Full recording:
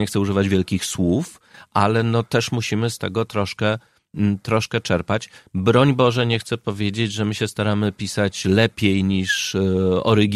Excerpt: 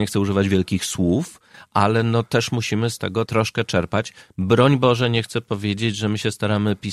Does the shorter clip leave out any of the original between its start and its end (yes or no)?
yes